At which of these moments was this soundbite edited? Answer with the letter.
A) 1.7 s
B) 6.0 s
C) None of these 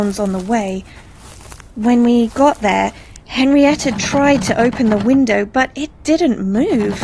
B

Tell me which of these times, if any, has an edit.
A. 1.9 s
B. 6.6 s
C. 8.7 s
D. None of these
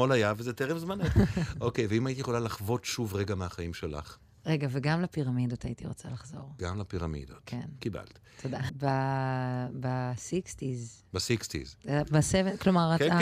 C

